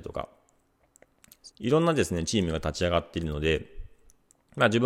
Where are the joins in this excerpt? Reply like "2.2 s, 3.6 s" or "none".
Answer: 1.5 s